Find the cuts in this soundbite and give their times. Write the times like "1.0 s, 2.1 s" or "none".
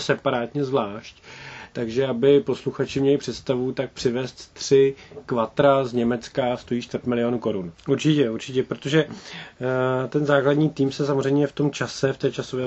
7.7 s